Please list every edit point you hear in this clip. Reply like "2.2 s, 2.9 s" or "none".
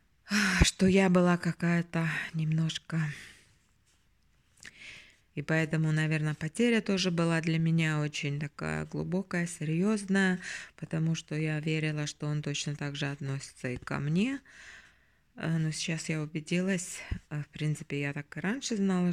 5.3 s